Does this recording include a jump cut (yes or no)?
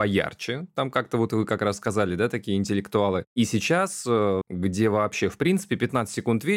yes